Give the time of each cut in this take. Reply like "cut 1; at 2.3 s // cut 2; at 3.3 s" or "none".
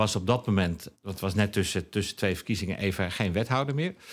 cut 1; at 0.9 s